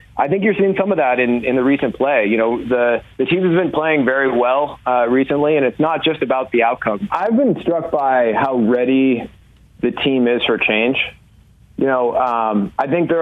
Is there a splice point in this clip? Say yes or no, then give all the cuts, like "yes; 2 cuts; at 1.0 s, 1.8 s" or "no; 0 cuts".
yes; 1 cut; at 7.1 s